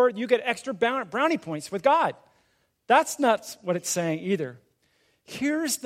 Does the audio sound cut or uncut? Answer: uncut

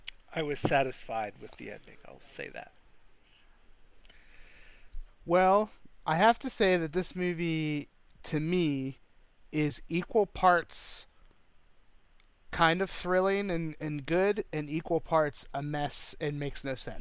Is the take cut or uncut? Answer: cut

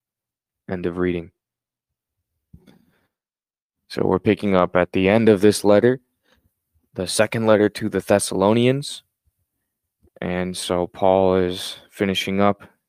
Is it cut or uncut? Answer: uncut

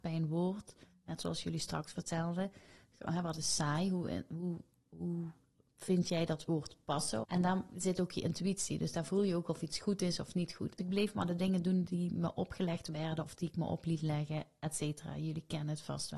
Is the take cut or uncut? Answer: cut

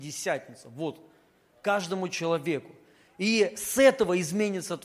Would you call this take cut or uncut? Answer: uncut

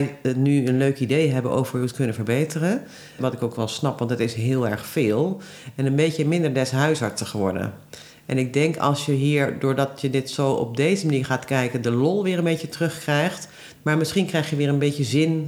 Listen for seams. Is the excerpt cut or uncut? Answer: cut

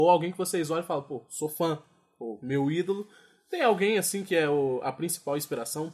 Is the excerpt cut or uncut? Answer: uncut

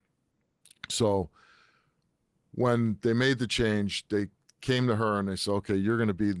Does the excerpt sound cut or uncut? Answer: uncut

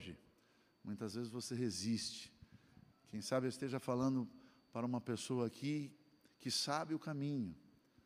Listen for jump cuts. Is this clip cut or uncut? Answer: uncut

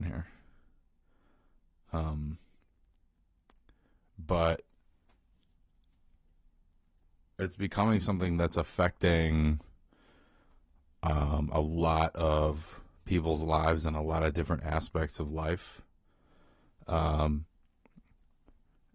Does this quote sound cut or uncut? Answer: uncut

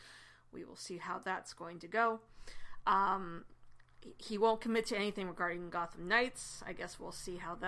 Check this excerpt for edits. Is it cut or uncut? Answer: uncut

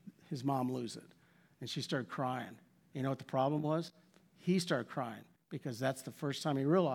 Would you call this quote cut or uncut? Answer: uncut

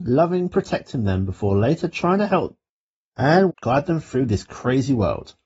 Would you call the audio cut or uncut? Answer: cut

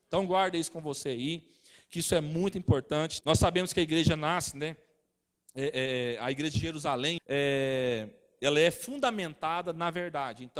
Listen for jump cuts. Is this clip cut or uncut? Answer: cut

